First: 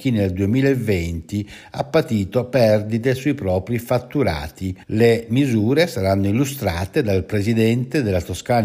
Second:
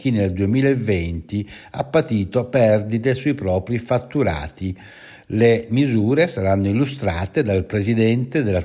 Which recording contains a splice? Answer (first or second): first